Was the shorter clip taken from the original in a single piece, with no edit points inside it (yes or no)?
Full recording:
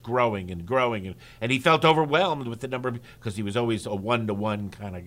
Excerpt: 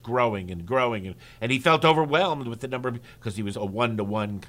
no